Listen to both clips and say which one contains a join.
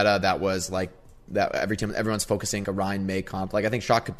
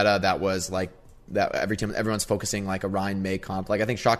first; 1 cut; at 2.6 s

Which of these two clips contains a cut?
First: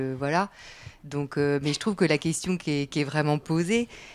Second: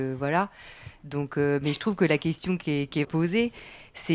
second; 1 cut; at 3.0 s

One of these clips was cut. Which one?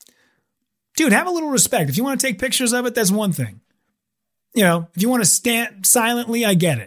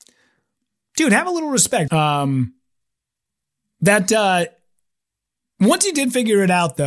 second; 1 cut; at 1.9 s

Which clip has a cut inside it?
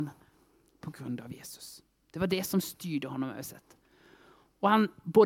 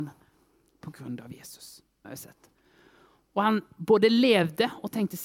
second; 1 cut; at 2.0 s

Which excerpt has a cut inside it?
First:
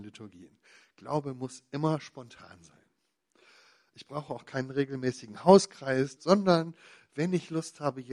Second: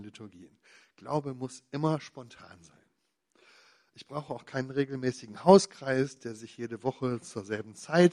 first; 1 cut; at 6.2 s

